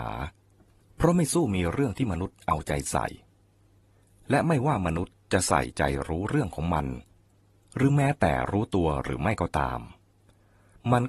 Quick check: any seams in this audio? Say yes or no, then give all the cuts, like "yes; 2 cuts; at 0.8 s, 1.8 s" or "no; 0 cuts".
no; 0 cuts